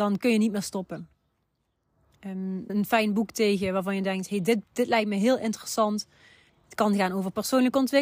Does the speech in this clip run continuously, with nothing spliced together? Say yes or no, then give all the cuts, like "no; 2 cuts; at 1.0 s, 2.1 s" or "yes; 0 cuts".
no; 2 cuts; at 2.7 s, 6.5 s